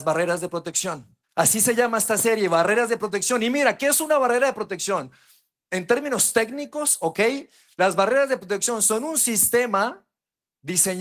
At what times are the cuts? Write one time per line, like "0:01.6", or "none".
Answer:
0:01.2